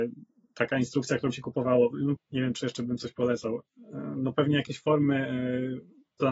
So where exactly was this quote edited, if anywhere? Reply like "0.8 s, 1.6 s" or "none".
2.2 s